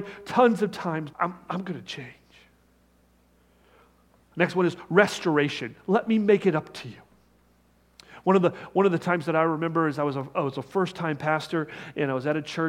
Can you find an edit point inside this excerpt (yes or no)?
yes